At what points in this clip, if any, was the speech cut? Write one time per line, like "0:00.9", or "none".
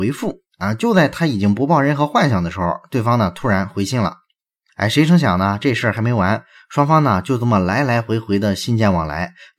0:04.7